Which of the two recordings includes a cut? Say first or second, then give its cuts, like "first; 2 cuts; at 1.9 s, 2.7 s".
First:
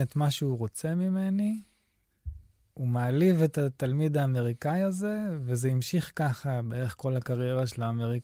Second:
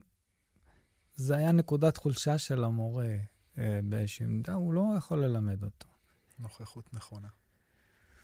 second; 1 cut; at 6.3 s